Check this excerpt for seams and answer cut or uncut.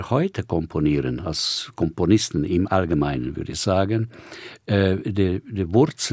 uncut